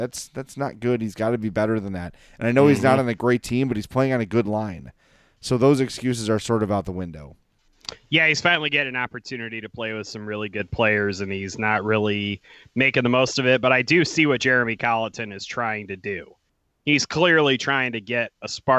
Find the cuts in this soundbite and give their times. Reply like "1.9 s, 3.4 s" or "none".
none

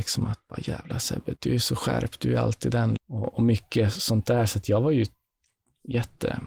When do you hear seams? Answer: 1.4 s, 3.0 s

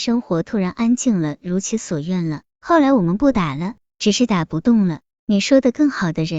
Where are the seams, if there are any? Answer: 2.5 s

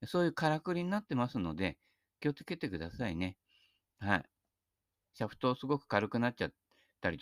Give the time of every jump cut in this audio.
5.1 s

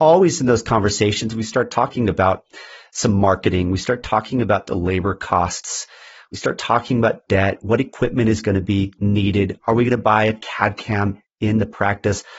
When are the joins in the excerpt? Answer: none

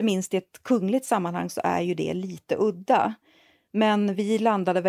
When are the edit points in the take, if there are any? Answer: none

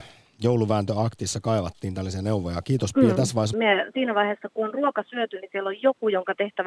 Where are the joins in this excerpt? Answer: 3.5 s

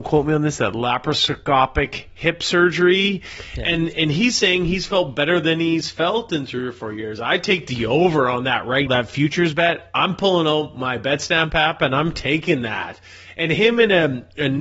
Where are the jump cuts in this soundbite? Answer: 8.9 s

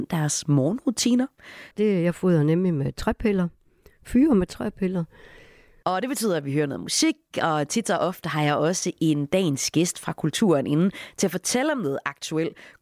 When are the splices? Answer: 1.7 s, 5.8 s

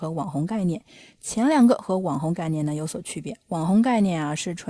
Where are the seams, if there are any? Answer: none

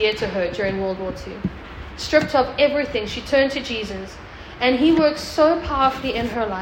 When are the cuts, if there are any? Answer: none

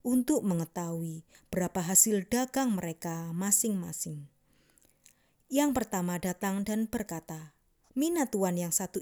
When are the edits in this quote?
7.9 s

